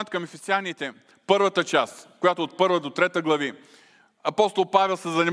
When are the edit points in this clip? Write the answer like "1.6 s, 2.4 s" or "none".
none